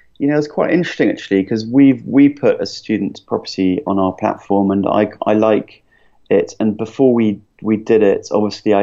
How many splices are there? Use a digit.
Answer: 0